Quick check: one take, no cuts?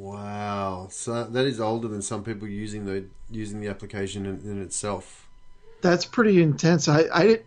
yes; 0 cuts

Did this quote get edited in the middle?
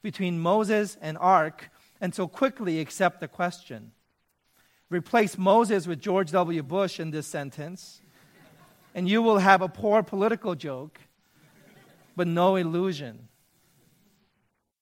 no; 0 cuts

